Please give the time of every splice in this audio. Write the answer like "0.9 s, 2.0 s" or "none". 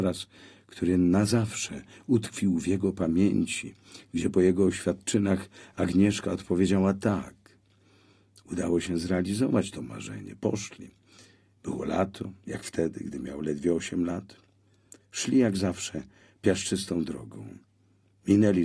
none